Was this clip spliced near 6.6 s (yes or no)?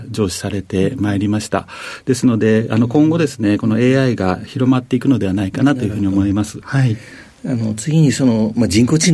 yes